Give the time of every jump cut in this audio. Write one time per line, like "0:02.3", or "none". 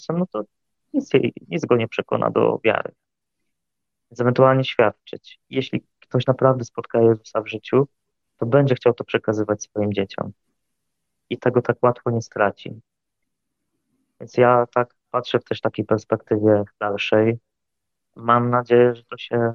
0:05.4